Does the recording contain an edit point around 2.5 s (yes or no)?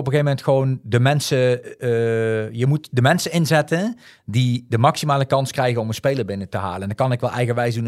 no